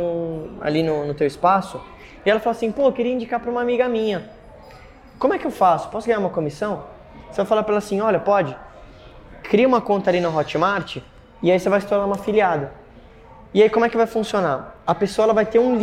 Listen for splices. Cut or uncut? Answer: uncut